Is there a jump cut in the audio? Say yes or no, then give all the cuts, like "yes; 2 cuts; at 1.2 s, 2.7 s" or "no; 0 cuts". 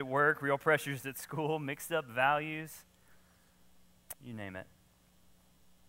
no; 0 cuts